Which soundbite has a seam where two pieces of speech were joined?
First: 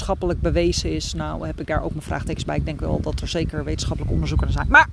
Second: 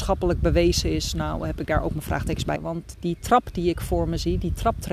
second; 1 cut; at 2.6 s

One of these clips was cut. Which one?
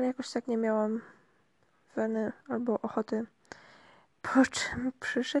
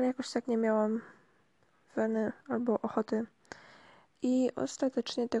first; 1 cut; at 4.1 s

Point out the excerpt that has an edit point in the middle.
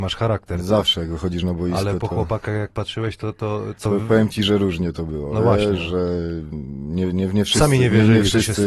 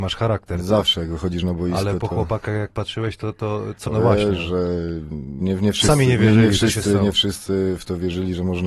second; 2 cuts; at 3.9 s, 5.4 s

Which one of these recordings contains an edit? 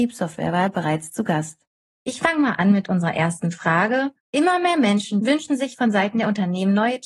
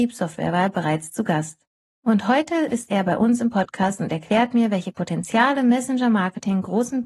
first; 2 cuts; at 1.8 s, 4.2 s

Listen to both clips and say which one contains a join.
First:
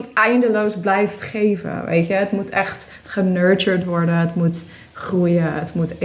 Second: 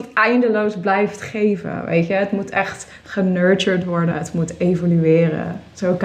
second; 1 cut; at 4.1 s

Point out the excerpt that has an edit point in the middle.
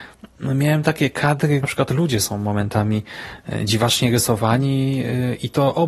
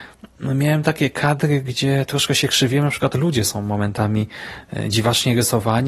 first; 1 cut; at 1.6 s

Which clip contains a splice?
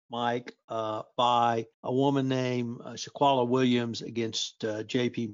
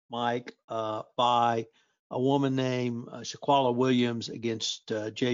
first; 1 cut; at 1.7 s

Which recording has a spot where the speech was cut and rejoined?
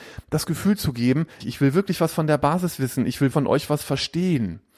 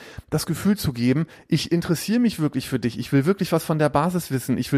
first; 2 cuts; at 1.4 s, 3.3 s

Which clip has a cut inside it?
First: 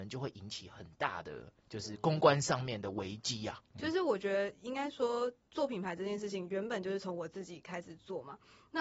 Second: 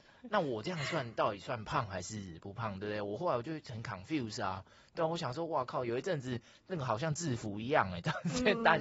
first; 2 cuts; at 1.6 s, 3.7 s

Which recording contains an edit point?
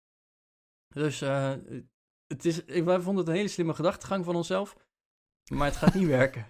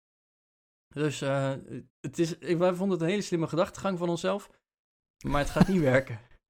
second; 1 cut; at 1.9 s

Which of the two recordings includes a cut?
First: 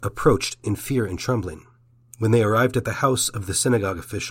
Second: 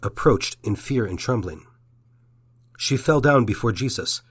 first; 1 cut; at 2.0 s

